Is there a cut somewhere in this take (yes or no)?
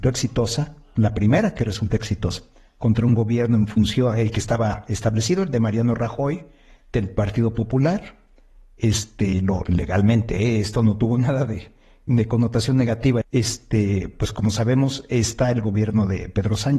yes